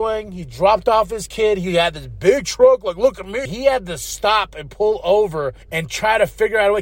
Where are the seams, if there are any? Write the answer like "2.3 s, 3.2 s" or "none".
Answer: 3.5 s, 5.6 s